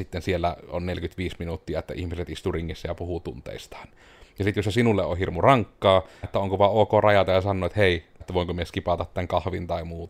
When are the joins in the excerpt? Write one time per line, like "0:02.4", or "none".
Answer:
0:06.2
0:08.2